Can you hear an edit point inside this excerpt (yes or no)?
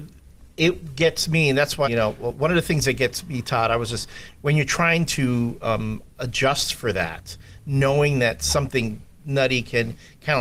yes